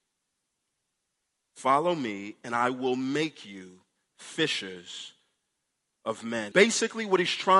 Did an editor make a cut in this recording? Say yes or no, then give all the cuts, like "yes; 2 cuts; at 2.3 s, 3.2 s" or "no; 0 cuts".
yes; 2 cuts; at 1.4 s, 6.5 s